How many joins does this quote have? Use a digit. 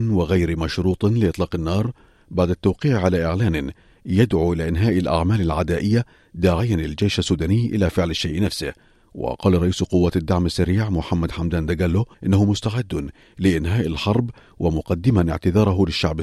1